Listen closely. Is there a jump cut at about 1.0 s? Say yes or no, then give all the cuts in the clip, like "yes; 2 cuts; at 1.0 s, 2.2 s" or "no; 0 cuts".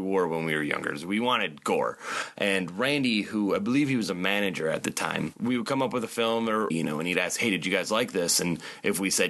no; 1 cut; at 6.7 s